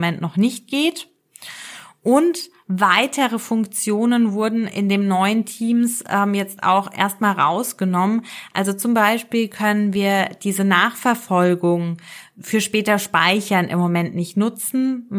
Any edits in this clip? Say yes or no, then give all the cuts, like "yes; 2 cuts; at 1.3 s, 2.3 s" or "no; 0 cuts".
no; 0 cuts